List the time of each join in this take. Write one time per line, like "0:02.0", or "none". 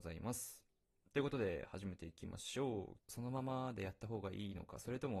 0:03.0